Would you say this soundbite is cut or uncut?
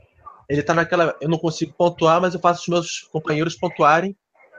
uncut